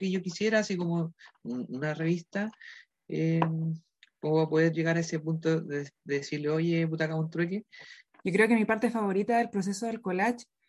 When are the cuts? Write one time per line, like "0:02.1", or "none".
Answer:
0:08.2